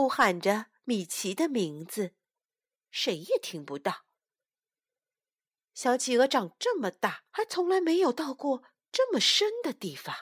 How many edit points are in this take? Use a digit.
2